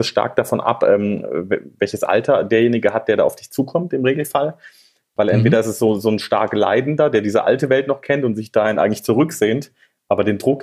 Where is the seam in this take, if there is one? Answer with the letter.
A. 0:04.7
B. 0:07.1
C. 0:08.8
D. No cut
D